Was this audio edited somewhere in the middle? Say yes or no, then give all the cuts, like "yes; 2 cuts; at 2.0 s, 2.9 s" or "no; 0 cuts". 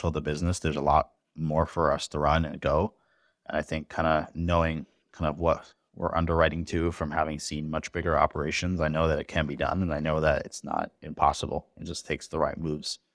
no; 0 cuts